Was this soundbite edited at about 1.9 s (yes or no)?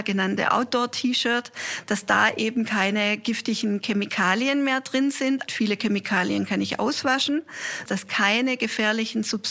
no